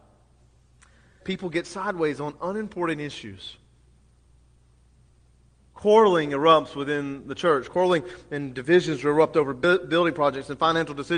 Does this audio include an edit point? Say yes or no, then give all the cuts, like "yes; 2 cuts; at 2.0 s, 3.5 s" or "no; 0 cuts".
yes; 1 cut; at 1.2 s